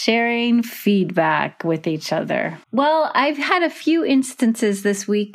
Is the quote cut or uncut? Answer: cut